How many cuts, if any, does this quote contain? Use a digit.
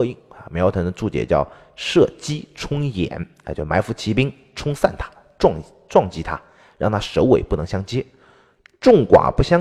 0